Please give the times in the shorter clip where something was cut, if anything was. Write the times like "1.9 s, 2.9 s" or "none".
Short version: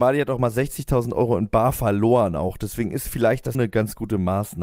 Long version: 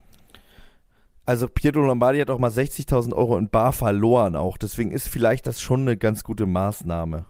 3.5 s